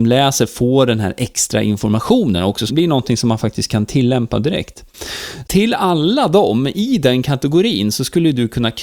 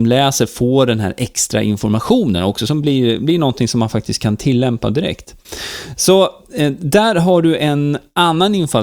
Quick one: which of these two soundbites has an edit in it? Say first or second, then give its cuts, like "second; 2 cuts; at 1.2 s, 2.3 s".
first; 2 cuts; at 2.7 s, 5.4 s